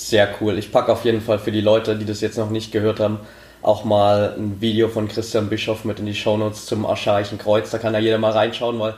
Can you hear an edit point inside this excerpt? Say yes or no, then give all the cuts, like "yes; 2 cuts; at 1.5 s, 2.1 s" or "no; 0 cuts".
no; 0 cuts